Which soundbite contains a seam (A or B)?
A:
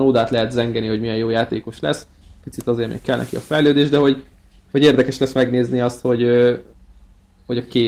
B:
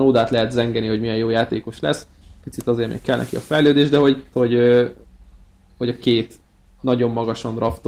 B